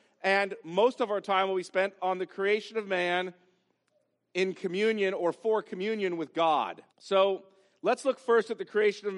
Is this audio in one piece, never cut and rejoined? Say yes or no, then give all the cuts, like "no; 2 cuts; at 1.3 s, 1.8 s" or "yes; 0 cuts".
no; 1 cut; at 6.9 s